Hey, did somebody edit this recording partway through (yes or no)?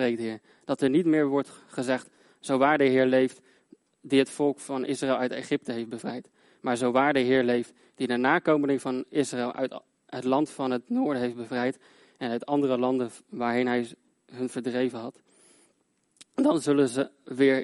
no